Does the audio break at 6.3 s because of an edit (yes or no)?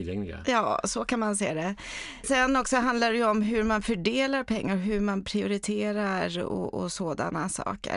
no